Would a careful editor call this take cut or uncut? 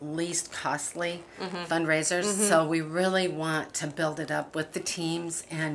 uncut